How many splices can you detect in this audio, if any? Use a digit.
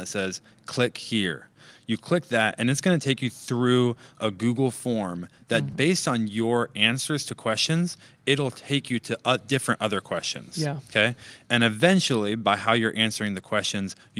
0